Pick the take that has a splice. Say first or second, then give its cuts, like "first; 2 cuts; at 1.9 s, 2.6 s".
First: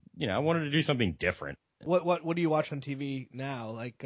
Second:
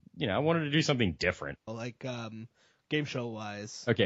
second; 1 cut; at 1.7 s